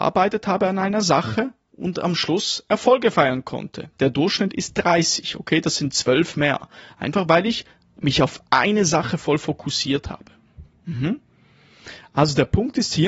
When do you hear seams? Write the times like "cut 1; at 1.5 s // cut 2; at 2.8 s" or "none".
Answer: cut 1; at 3.9 s

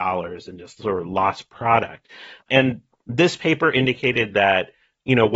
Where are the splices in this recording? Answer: cut 1; at 2.4 s

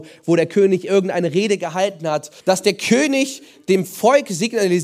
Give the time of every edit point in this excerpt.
cut 1; at 2.4 s

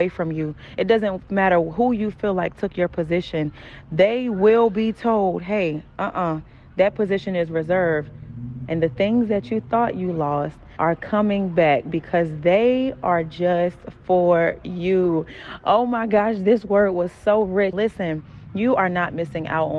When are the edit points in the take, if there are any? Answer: cut 1; at 8.7 s // cut 2; at 10.8 s // cut 3; at 17.7 s

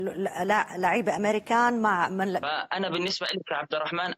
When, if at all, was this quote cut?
cut 1; at 2.4 s

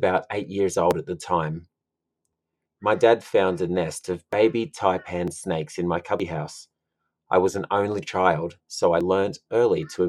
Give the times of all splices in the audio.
cut 1; at 2.7 s

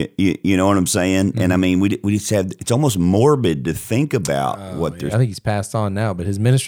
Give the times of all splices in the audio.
cut 1; at 5.1 s

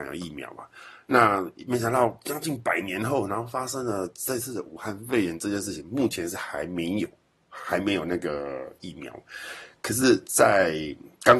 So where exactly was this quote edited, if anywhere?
none

